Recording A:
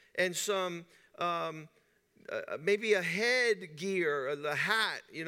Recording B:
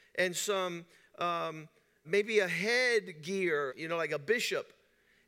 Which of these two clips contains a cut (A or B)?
B